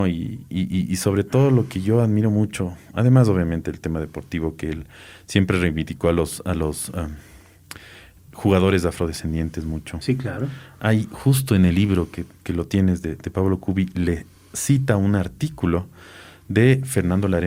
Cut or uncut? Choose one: uncut